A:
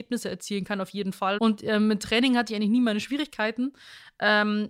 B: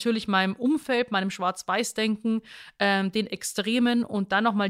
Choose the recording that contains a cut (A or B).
A